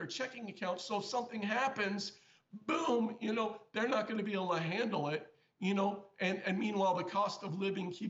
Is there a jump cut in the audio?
no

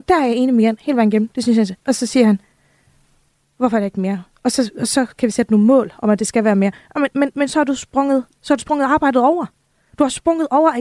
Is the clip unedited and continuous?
yes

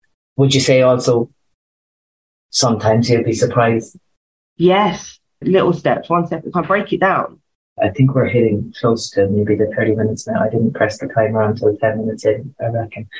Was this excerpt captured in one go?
no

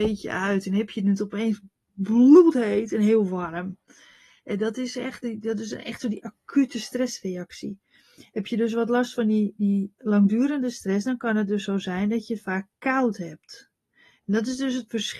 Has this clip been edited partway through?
no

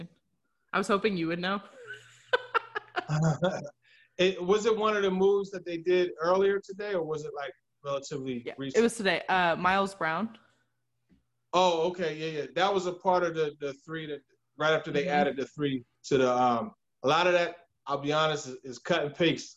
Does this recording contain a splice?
yes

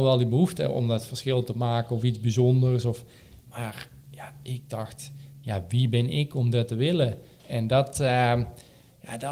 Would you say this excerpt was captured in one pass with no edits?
no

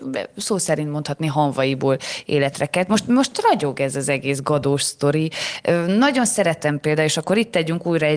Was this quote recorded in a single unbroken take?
yes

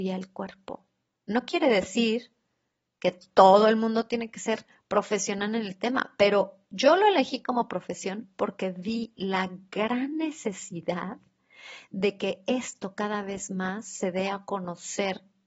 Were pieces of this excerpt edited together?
yes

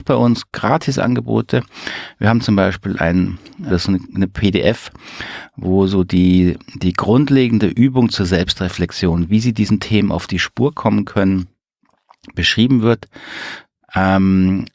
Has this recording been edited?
yes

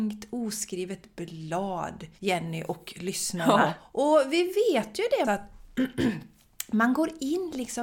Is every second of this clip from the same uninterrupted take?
no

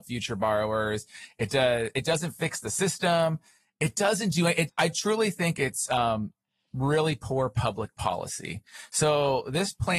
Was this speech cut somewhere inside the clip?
yes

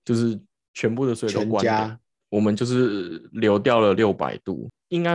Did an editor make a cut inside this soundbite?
yes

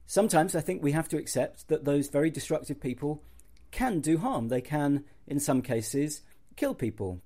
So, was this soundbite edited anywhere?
no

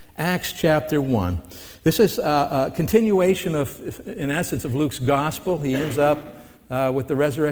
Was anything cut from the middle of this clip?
no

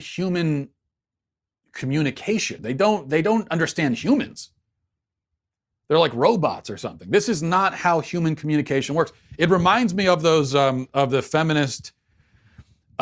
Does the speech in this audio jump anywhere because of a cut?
no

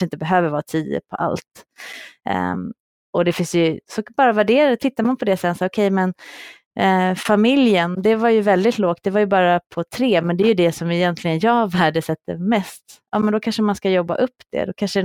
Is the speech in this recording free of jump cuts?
yes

